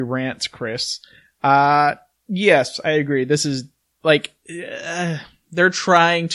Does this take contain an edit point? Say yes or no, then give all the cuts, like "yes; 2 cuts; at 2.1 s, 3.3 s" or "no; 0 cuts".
no; 0 cuts